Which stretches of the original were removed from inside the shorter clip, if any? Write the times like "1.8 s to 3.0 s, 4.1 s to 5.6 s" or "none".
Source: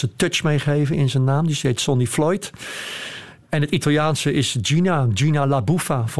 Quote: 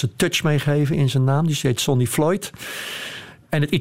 none